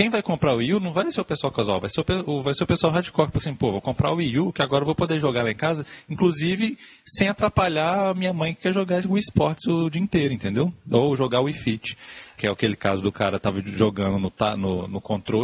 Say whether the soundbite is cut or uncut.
cut